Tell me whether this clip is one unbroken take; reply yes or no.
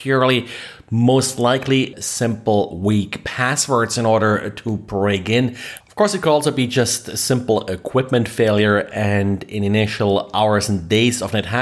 no